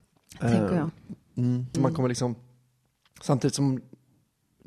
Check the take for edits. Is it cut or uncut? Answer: cut